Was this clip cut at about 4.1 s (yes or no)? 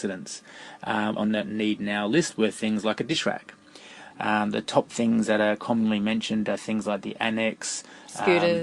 yes